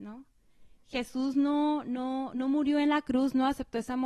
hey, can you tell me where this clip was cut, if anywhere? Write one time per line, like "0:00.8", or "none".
none